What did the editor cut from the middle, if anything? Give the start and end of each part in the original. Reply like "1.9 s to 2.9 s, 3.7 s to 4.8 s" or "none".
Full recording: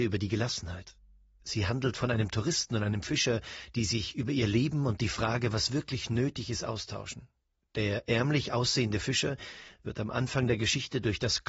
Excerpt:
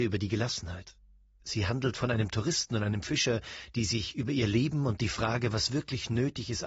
none